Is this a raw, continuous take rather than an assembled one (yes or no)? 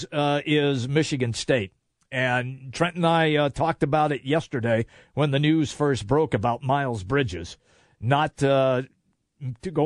yes